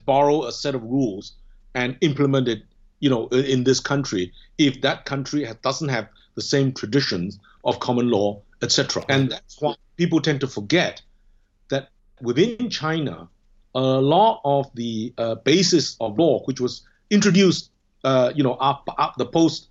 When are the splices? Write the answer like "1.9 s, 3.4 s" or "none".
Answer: 9.1 s